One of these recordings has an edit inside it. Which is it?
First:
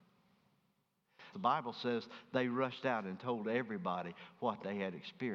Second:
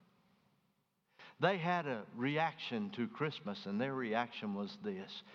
first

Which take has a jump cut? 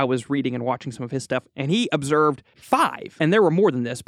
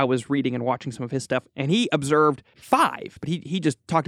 second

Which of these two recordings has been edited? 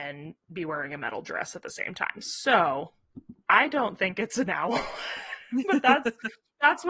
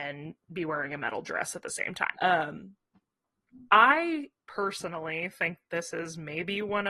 second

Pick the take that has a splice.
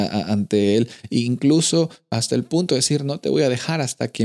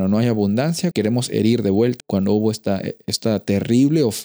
second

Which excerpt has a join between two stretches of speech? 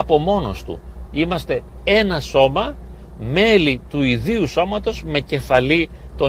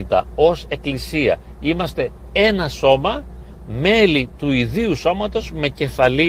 first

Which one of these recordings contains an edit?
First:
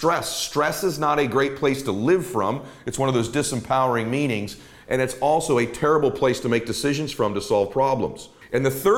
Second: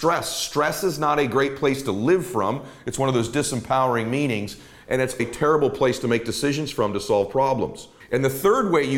second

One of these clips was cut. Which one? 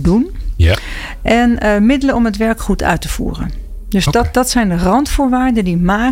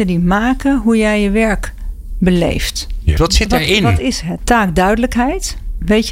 second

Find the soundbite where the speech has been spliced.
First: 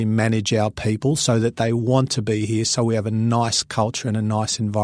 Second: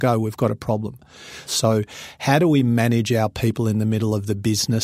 second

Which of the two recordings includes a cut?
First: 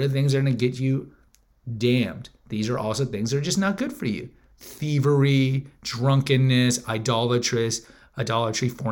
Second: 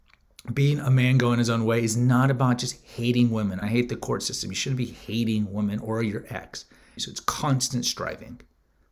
second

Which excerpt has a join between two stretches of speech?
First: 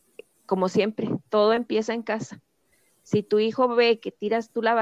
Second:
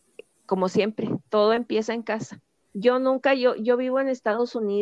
second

